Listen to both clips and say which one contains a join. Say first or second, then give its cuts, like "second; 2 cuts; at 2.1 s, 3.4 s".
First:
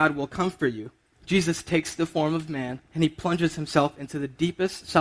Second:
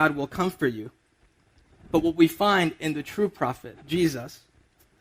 first; 2 cuts; at 1.1 s, 2.9 s